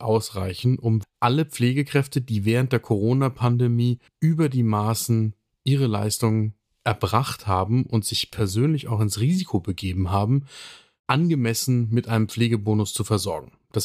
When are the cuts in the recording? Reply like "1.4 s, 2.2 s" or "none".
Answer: 1.0 s, 4.1 s

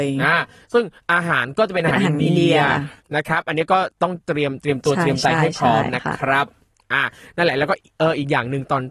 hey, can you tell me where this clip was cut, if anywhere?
none

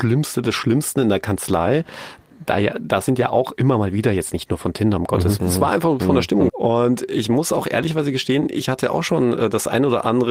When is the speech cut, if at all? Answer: 5.4 s, 6.5 s

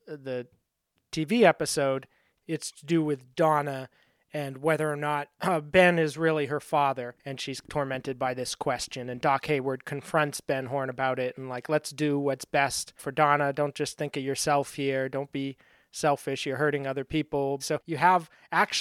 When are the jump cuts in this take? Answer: 17.6 s

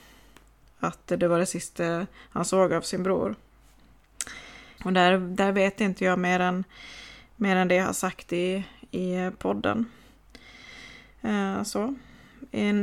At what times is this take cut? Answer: 4.8 s

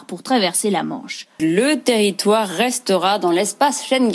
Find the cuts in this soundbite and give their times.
1.4 s

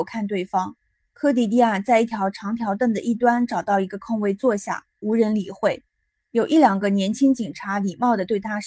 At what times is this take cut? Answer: 5.0 s

